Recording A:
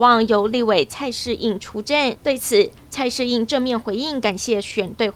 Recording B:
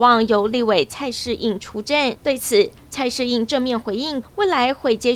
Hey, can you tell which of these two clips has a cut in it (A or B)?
B